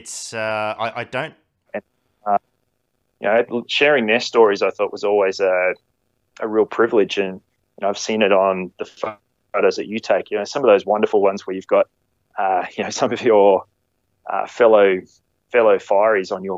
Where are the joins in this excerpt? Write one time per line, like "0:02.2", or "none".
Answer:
0:01.7